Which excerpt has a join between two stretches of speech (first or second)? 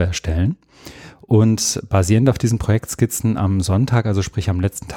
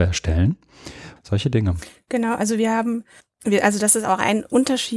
second